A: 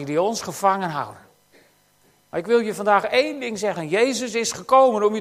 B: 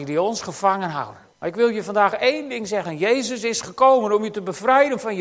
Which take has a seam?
B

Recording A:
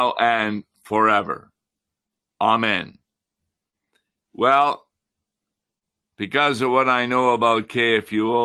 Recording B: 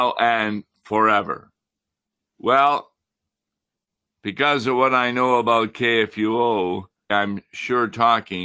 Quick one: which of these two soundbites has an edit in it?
B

